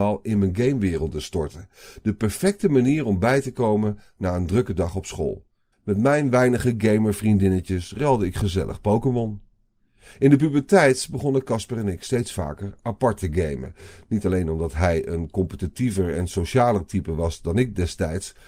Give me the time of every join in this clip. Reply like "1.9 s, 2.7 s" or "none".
5.7 s